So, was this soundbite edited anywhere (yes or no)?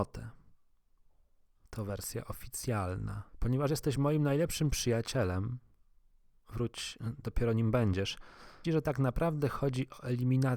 yes